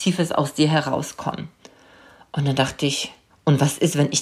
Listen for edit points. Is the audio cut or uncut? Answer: cut